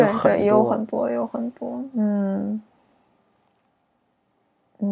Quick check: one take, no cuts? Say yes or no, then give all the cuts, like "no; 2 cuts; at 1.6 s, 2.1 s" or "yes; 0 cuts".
yes; 0 cuts